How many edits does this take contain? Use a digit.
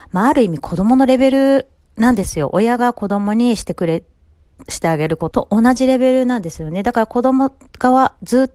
1